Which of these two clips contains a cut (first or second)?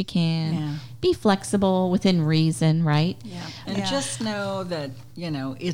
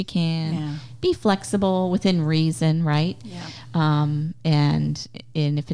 first